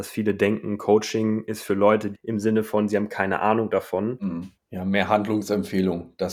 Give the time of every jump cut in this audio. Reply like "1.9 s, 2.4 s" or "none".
2.1 s, 4.5 s